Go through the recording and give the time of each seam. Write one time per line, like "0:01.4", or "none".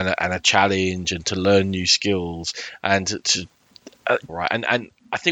0:04.3